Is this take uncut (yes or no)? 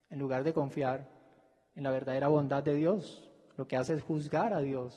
yes